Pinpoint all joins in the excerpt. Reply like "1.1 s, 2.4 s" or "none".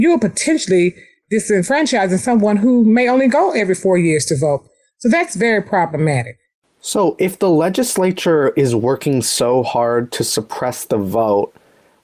none